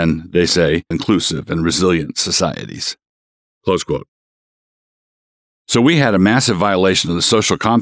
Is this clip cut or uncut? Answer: cut